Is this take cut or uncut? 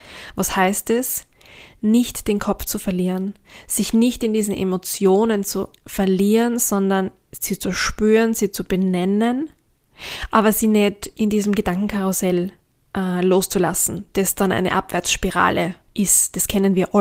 uncut